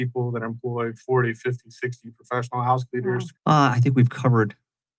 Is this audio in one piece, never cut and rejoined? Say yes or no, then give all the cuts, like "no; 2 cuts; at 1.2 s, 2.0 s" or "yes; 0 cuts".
no; 1 cut; at 3.4 s